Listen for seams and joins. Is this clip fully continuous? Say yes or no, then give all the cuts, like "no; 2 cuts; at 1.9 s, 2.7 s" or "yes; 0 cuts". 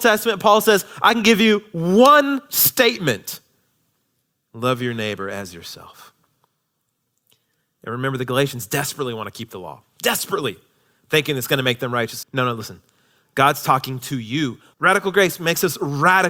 no; 2 cuts; at 12.2 s, 14.7 s